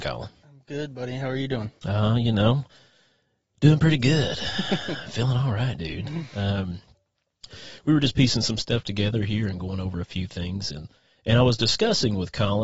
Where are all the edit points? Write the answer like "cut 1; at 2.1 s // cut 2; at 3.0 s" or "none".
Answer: none

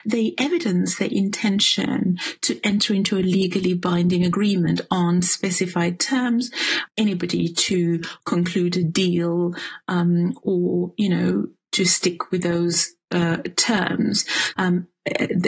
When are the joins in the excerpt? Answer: cut 1; at 6.9 s // cut 2; at 14.5 s

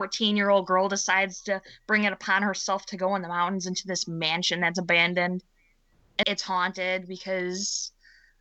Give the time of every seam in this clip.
cut 1; at 6.2 s

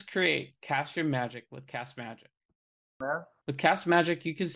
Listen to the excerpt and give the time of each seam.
cut 1; at 3.4 s

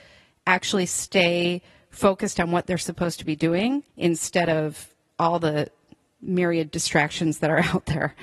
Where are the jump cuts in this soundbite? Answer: cut 1; at 3.9 s

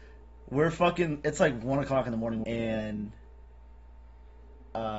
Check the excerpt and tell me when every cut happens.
cut 1; at 2.4 s

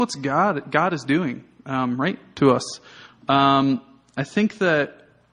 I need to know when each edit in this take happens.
none

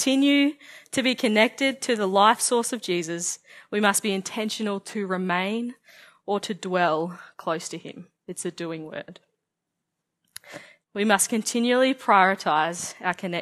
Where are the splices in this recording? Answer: cut 1; at 8.2 s // cut 2; at 10.8 s

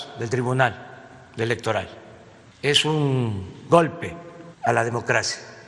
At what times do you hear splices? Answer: none

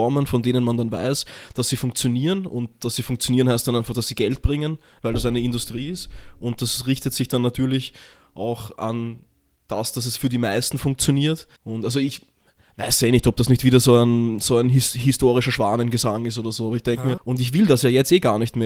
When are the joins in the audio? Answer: cut 1; at 11.6 s // cut 2; at 17.2 s

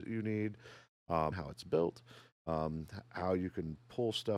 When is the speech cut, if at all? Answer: cut 1; at 1.3 s

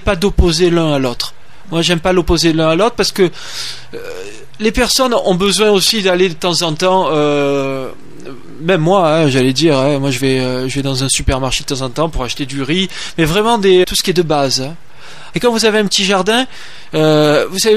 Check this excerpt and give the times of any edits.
cut 1; at 13.8 s // cut 2; at 15.3 s

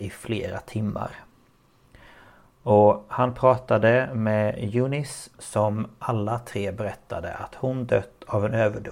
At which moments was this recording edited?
cut 1; at 5.3 s

